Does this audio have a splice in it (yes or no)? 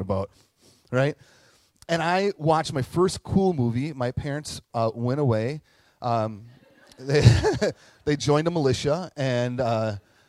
no